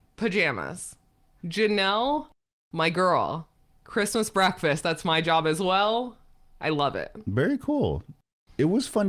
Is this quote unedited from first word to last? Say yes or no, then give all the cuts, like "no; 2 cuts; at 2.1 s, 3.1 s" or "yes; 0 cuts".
yes; 0 cuts